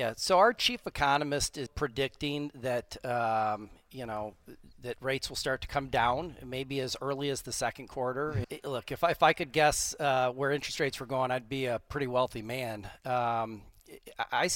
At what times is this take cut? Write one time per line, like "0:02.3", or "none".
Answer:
0:01.7
0:08.4